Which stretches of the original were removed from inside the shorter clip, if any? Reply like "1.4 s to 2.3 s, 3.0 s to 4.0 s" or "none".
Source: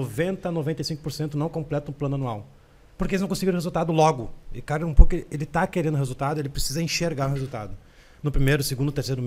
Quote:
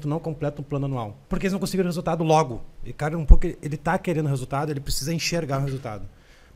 2.5 s to 2.9 s